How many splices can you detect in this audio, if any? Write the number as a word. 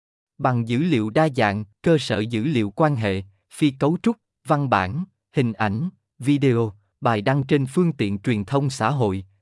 one